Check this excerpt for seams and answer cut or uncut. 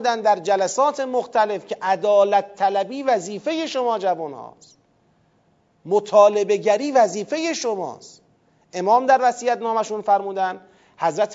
uncut